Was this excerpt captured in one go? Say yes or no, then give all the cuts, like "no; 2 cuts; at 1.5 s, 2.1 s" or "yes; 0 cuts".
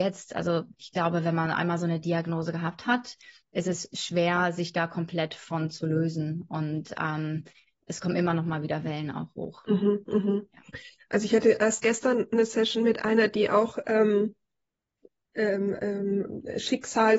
yes; 0 cuts